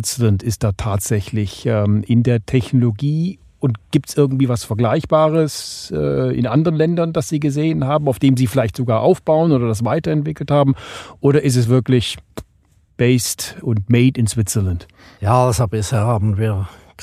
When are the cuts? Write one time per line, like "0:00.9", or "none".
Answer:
none